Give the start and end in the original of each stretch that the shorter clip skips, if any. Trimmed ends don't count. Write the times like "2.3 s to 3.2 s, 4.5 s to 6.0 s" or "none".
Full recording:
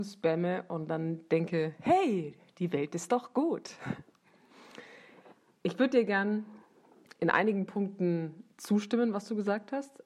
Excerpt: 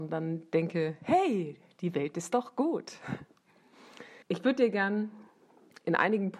5.0 s to 5.6 s